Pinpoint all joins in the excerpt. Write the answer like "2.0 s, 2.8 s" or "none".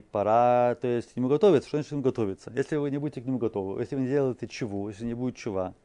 none